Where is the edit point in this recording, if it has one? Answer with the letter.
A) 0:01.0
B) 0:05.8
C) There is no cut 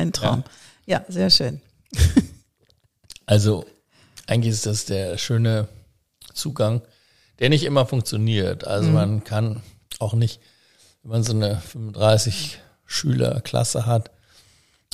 C